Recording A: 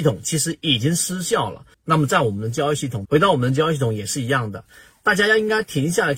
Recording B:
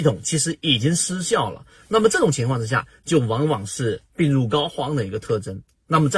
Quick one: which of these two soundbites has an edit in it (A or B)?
A